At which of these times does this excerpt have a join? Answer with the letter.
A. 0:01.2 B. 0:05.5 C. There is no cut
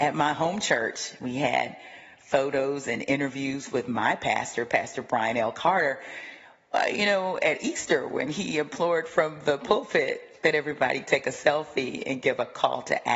C